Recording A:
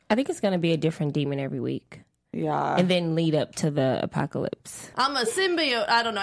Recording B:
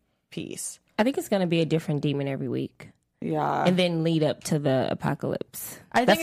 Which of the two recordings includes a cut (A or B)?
A